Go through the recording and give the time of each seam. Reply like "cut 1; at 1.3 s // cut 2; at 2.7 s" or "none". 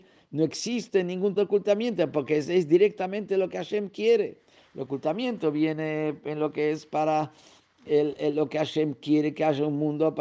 cut 1; at 1.4 s

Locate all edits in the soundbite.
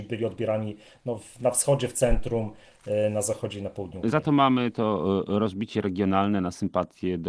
none

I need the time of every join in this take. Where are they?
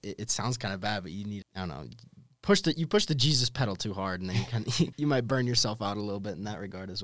cut 1; at 1.4 s // cut 2; at 4.9 s

